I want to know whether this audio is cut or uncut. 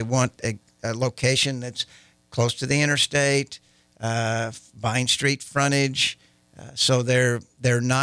uncut